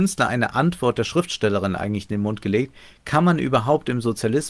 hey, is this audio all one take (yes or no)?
yes